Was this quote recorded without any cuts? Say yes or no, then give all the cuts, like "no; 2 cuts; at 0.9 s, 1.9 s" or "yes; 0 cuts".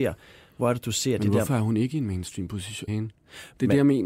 no; 1 cut; at 2.9 s